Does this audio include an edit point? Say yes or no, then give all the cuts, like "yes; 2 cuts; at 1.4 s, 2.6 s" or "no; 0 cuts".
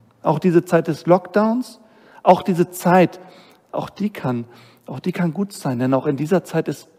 no; 0 cuts